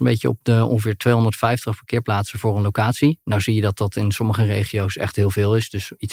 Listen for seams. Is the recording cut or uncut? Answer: uncut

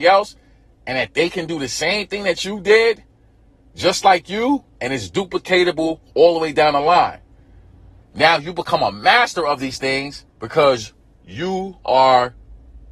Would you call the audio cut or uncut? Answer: cut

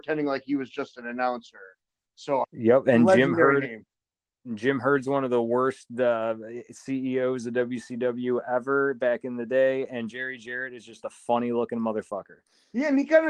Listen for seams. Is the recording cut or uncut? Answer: cut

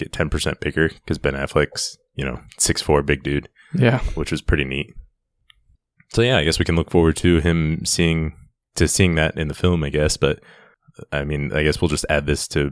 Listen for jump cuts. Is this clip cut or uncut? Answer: uncut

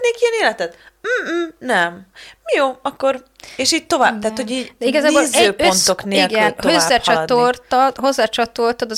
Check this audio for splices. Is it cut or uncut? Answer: uncut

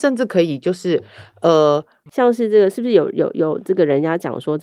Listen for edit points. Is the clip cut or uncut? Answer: cut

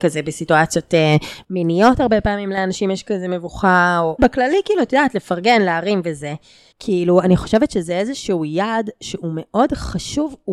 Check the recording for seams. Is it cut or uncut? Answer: cut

